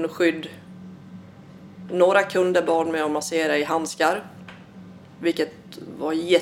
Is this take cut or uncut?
uncut